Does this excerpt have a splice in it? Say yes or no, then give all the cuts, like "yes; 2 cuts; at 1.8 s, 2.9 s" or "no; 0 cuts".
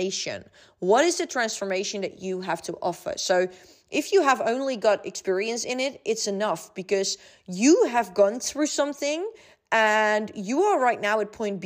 no; 0 cuts